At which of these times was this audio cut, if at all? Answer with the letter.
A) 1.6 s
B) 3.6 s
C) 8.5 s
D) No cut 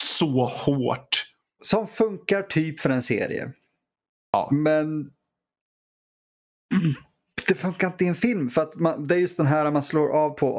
A